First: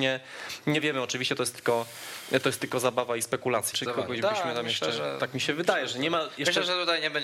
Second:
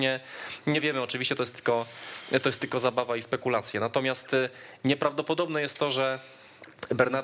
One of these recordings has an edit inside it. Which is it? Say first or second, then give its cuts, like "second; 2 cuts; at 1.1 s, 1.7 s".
first; 1 cut; at 3.7 s